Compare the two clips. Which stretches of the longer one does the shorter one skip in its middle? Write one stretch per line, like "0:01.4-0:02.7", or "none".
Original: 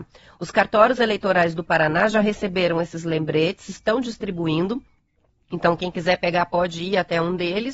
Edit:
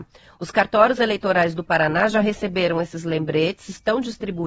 none